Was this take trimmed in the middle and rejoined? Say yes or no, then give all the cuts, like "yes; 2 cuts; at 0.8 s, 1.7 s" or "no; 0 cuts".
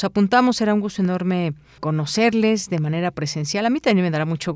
yes; 1 cut; at 1.8 s